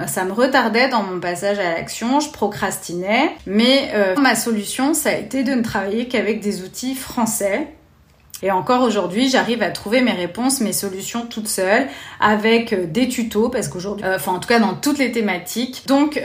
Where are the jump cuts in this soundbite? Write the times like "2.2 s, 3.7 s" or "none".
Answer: 4.2 s, 8.4 s, 14.0 s